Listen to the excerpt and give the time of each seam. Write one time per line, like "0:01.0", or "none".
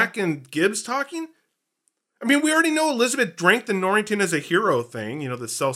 none